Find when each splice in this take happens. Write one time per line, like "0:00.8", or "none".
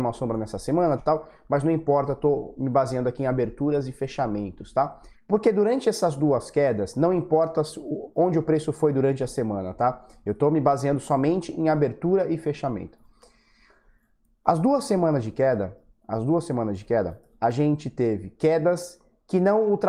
0:01.0
0:05.1